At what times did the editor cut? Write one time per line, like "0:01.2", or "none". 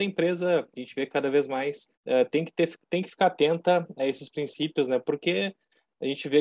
0:02.0

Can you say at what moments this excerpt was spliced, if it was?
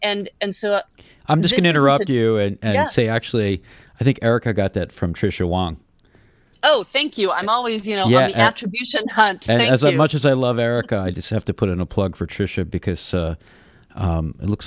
none

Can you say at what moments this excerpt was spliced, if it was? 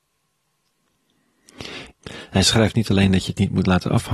0:01.9

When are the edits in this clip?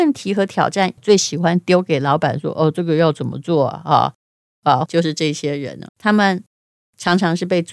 0:01.0
0:04.9
0:05.9

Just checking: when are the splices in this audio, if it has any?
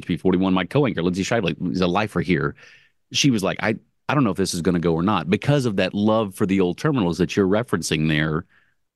none

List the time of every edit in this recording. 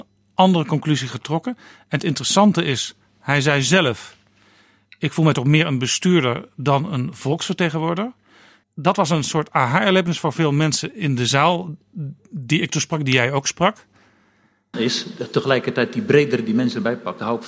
0:08.6
0:14.7

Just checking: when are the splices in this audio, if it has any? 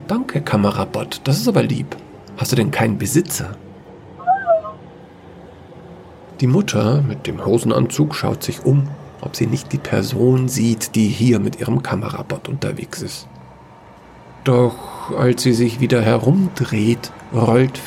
none

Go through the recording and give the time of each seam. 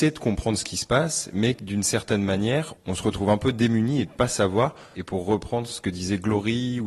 0:04.9

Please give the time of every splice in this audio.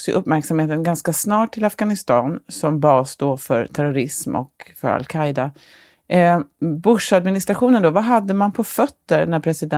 none

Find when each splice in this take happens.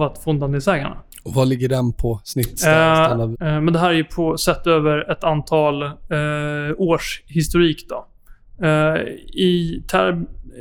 0:03.3

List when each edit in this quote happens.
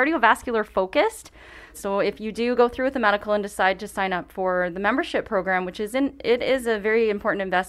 0:01.7

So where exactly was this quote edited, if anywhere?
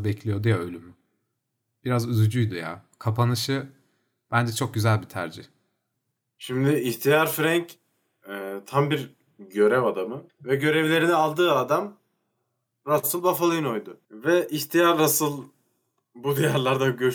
0:10.3

